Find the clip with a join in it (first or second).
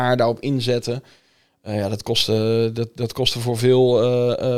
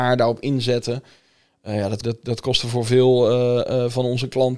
second